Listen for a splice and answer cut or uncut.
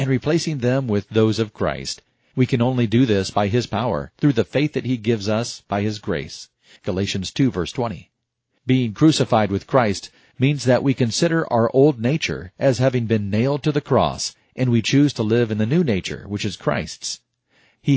cut